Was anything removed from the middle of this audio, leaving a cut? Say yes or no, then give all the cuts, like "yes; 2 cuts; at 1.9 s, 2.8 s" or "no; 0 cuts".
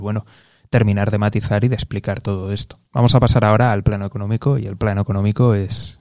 yes; 1 cut; at 2.9 s